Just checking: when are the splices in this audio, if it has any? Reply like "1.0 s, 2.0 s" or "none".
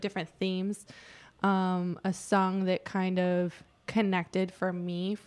none